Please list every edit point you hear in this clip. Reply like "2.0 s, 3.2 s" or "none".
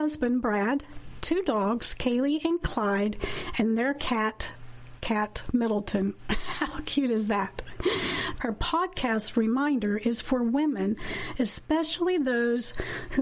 8.4 s